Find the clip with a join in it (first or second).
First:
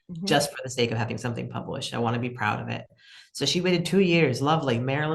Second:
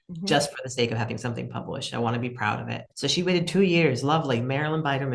second